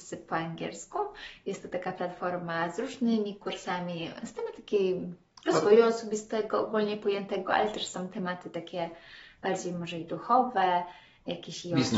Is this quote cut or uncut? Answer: uncut